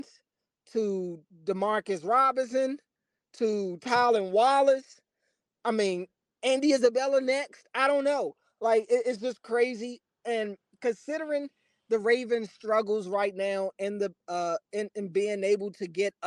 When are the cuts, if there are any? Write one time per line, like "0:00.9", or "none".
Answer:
none